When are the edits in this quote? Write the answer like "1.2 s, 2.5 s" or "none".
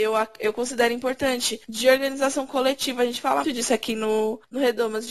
3.4 s